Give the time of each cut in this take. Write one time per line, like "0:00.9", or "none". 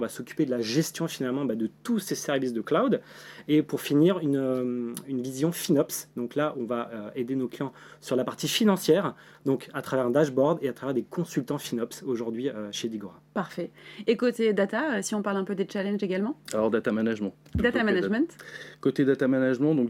none